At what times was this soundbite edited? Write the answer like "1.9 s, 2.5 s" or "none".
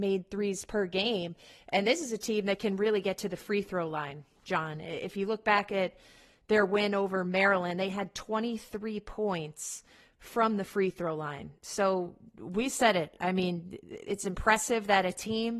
none